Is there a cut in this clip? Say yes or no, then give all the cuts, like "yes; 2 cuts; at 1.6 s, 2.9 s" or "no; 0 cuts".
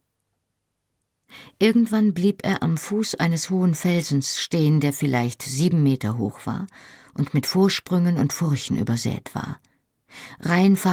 no; 0 cuts